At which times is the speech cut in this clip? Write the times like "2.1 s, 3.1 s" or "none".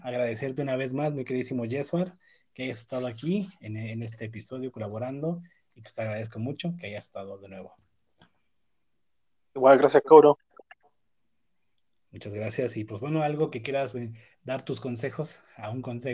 none